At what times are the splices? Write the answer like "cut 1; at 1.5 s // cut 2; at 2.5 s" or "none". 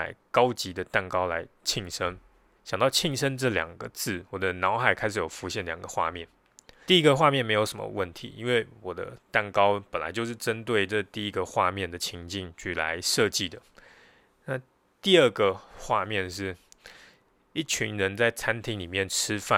cut 1; at 2.6 s // cut 2; at 6.9 s